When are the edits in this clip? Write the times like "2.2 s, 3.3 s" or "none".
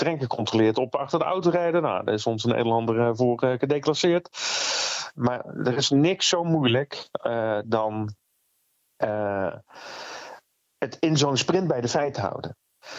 5.1 s